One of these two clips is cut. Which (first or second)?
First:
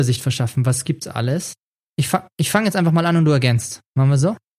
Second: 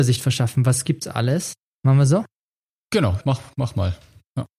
second